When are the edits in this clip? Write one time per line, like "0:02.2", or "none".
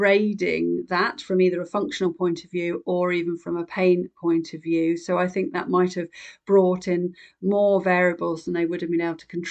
none